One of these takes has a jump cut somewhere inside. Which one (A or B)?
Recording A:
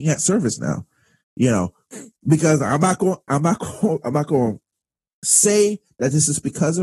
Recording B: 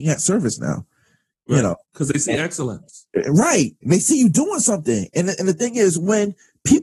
A